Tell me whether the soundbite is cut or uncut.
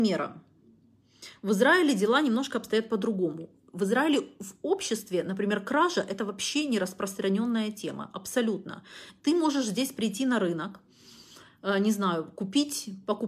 uncut